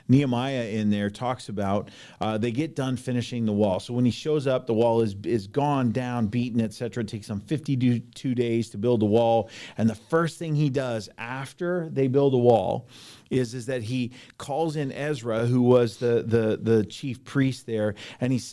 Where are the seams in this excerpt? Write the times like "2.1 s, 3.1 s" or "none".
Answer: none